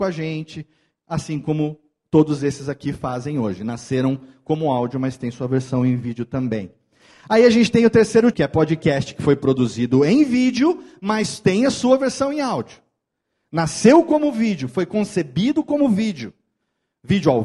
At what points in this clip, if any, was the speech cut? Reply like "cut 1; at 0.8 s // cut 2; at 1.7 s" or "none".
cut 1; at 8.3 s

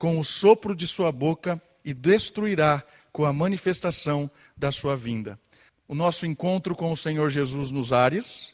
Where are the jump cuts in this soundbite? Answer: cut 1; at 5.7 s

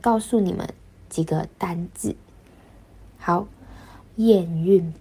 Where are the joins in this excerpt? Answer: cut 1; at 4.1 s

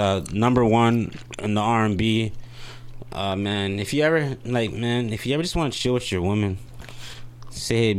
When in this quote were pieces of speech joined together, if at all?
none

